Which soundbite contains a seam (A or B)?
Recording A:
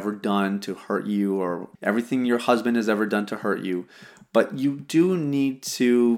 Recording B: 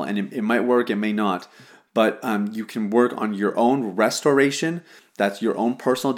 A